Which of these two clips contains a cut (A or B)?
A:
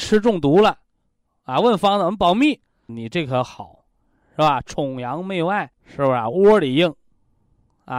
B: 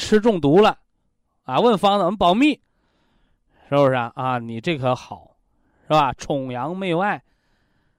A